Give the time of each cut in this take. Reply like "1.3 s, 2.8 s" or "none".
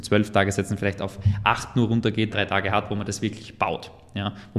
2.3 s